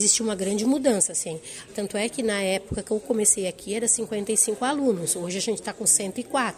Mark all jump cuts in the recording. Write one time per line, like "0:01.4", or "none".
0:01.7